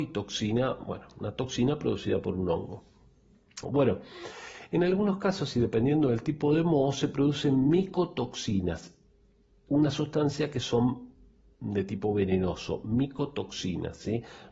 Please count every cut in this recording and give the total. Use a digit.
1